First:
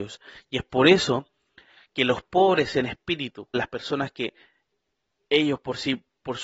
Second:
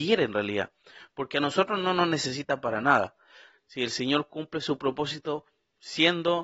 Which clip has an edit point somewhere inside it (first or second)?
first